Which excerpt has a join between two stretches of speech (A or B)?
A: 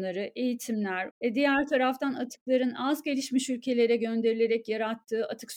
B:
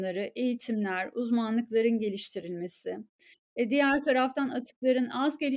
A